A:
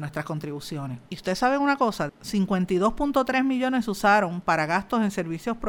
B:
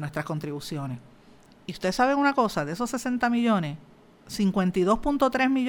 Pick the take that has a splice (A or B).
A